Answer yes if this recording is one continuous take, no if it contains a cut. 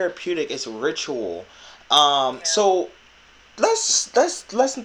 yes